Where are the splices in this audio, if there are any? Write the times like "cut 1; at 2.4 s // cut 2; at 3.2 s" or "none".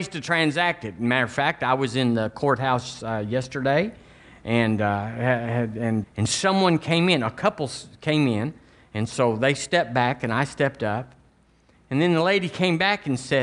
cut 1; at 6.0 s